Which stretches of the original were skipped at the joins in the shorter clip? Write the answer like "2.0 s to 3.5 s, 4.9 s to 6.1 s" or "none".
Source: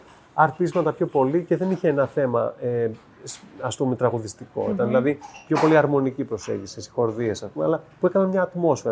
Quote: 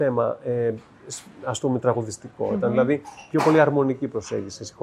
none